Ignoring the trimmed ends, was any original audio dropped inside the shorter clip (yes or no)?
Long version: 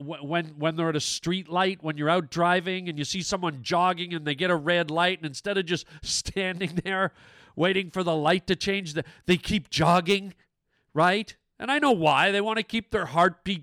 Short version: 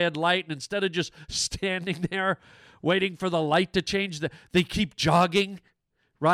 no